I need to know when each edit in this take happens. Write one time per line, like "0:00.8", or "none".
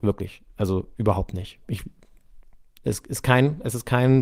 none